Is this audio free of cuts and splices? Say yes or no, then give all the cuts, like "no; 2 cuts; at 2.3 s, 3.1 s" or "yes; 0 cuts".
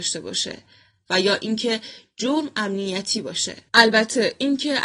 no; 1 cut; at 3.7 s